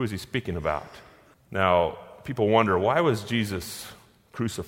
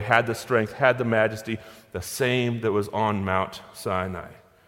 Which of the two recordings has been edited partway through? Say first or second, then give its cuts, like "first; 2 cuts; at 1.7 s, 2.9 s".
first; 1 cut; at 1.3 s